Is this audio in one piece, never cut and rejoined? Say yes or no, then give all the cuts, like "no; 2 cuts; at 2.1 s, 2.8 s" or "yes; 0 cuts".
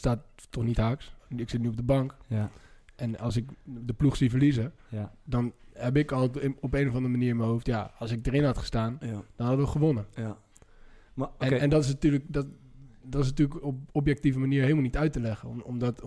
no; 1 cut; at 1.2 s